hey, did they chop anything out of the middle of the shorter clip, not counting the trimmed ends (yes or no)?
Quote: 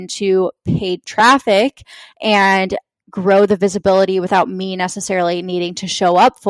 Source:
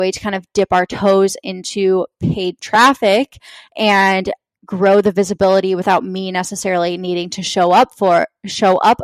no